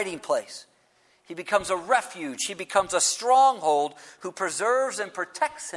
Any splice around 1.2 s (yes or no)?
no